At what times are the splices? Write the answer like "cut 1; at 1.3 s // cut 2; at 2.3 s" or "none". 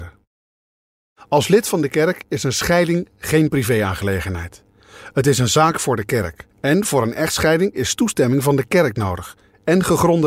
cut 1; at 6.5 s